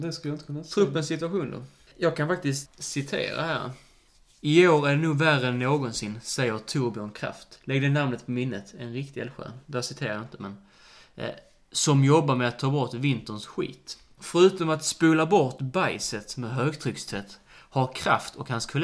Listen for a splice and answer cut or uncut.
uncut